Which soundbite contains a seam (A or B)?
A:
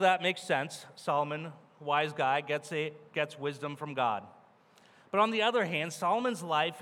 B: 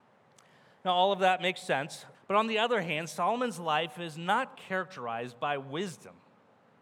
B